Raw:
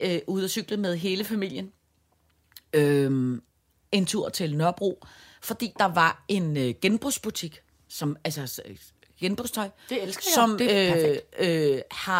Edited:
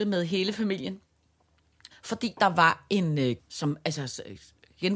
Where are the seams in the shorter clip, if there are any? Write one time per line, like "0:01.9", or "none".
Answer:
0:01.9
0:03.4